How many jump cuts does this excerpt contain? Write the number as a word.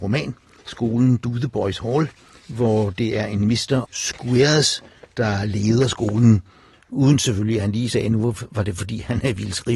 two